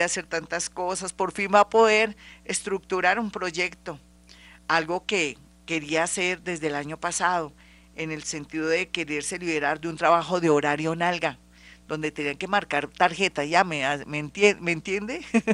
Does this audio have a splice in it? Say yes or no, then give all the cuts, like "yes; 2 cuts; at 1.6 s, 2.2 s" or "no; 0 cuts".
no; 0 cuts